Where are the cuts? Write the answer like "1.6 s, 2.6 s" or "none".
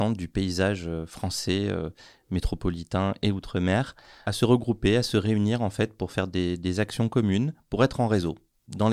none